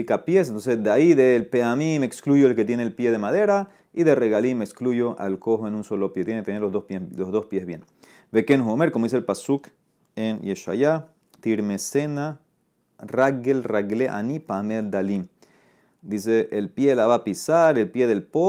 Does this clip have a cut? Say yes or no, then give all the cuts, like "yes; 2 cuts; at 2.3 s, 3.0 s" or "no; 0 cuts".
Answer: no; 0 cuts